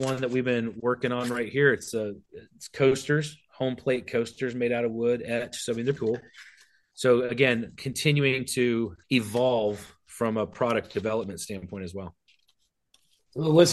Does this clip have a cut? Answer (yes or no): yes